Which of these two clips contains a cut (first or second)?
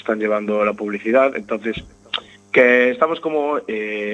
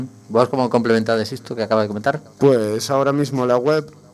second